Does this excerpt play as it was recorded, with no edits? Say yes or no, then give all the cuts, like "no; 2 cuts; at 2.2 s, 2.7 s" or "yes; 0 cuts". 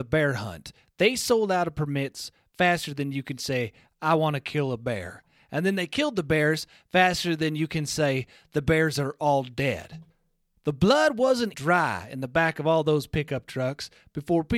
no; 1 cut; at 11.5 s